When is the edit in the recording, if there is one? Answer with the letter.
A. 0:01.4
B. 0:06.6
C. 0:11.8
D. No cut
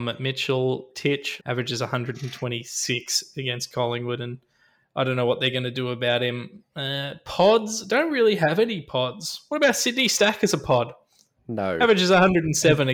A